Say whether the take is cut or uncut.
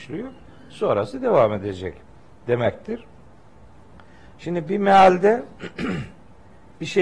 uncut